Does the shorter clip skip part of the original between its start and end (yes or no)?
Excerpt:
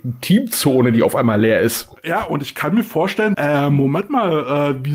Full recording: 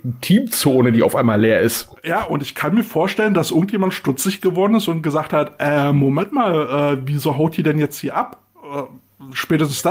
yes